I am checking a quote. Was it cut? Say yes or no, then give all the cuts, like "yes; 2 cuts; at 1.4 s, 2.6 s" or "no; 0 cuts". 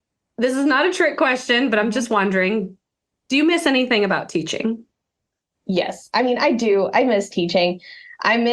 no; 0 cuts